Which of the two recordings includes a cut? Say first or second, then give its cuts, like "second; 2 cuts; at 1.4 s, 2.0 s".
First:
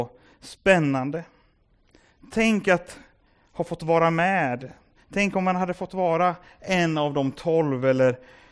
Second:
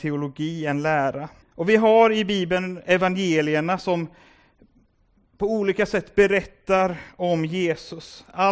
second; 1 cut; at 1.4 s